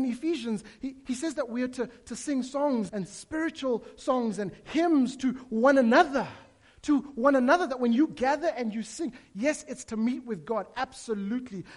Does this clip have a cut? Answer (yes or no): yes